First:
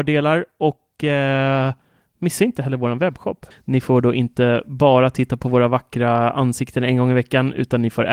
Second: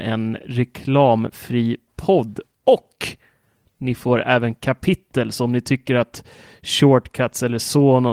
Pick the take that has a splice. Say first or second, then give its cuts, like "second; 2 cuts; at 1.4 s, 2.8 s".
first; 1 cut; at 3.5 s